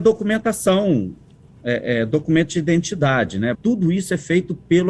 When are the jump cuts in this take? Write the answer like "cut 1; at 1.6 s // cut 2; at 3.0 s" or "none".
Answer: cut 1; at 3.5 s